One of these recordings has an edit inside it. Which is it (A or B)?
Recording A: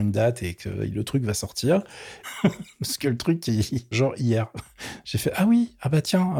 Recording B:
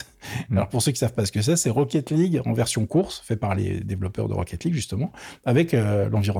A